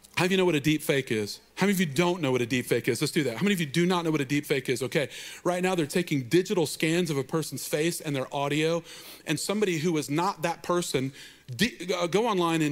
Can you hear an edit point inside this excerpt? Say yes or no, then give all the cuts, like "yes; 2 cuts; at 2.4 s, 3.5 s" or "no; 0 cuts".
yes; 2 cuts; at 1.5 s, 9.4 s